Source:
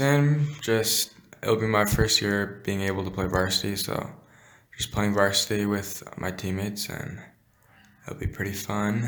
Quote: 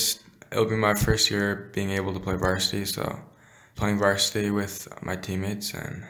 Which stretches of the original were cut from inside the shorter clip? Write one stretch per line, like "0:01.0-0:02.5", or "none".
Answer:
0:04.7-0:04.9